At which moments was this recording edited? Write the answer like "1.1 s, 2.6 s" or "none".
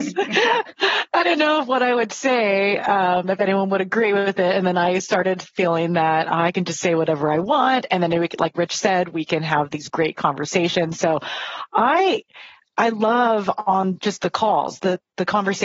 none